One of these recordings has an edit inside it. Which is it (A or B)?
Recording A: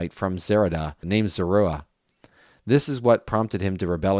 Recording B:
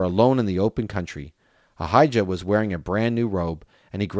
A